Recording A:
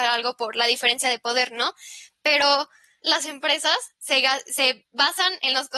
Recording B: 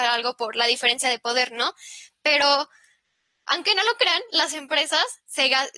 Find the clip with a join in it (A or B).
A